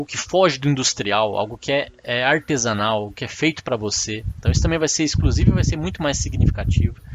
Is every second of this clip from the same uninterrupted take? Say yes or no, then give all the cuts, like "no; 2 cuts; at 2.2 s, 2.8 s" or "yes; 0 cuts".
yes; 0 cuts